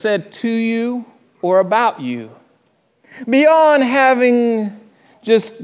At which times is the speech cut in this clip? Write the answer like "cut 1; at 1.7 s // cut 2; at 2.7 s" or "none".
none